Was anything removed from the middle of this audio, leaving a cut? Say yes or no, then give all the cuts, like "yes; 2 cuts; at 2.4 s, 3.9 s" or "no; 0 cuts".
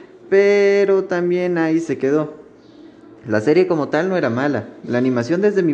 no; 0 cuts